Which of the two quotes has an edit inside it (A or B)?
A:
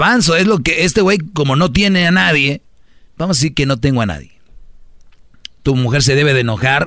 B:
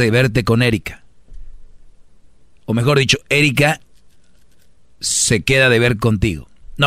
A